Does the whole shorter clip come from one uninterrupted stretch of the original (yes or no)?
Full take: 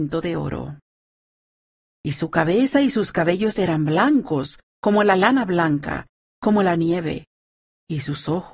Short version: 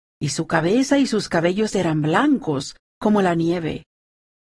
no